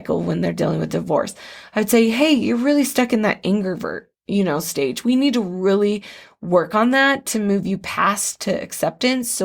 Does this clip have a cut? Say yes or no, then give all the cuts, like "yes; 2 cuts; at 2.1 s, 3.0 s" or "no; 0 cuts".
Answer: no; 0 cuts